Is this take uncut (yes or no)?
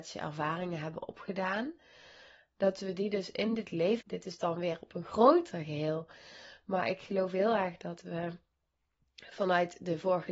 no